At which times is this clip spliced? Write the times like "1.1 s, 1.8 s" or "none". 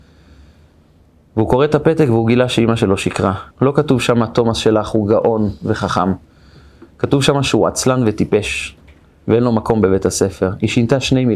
3.5 s